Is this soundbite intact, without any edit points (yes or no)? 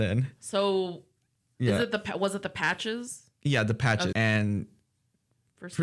no